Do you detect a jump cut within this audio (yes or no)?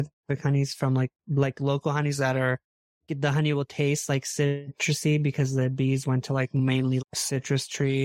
yes